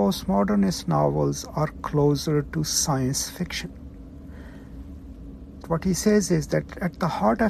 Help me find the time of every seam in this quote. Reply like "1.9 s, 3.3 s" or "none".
5.6 s